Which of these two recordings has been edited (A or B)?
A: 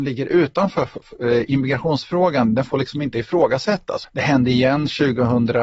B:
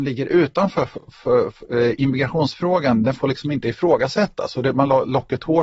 A